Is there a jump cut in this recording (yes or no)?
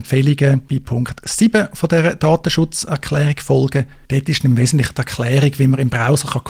no